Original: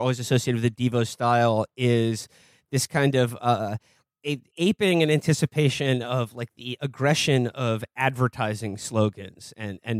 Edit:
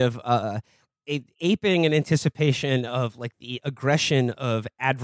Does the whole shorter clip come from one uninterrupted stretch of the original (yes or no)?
yes